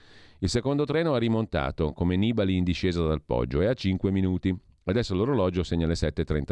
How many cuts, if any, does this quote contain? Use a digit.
0